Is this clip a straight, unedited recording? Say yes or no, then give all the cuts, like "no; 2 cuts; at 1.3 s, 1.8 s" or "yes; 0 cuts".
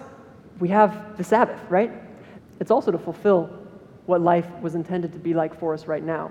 no; 1 cut; at 2.4 s